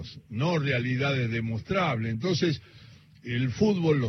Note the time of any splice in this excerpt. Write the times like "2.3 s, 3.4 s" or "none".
none